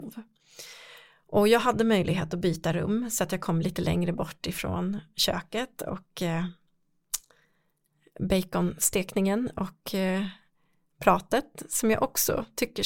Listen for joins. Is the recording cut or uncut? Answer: uncut